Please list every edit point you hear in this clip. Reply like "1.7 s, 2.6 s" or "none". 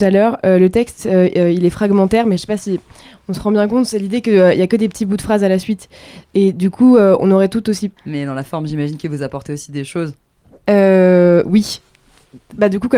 8.0 s

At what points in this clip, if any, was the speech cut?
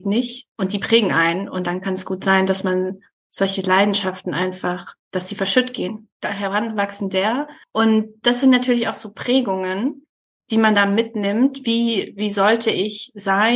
6.2 s

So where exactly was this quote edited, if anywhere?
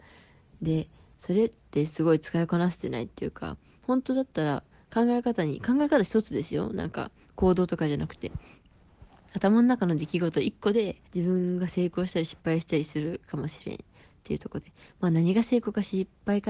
11.1 s

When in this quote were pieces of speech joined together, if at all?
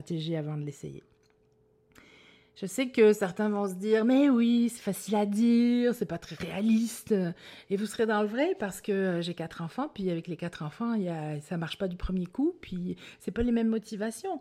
none

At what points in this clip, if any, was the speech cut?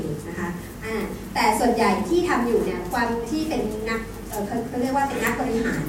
none

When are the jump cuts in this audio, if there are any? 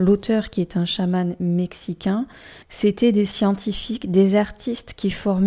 2.6 s

